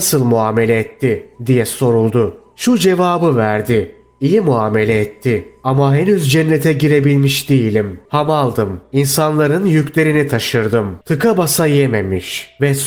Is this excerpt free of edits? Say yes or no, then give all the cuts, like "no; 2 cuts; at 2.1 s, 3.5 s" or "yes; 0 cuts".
no; 2 cuts; at 8.1 s, 11.0 s